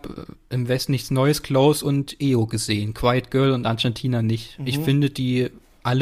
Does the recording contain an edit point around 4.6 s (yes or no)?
no